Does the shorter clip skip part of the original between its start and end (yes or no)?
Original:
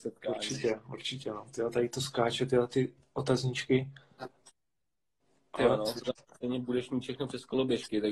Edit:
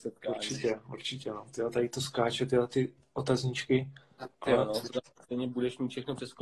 yes